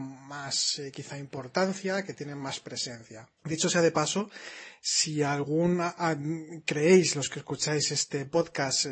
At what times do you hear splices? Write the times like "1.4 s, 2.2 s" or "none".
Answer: 3.4 s